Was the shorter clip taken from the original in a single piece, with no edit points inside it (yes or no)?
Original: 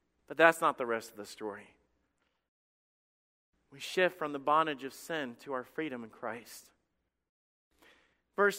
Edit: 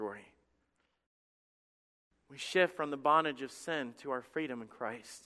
yes